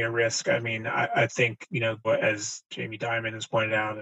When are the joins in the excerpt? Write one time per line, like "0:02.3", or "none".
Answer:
0:02.0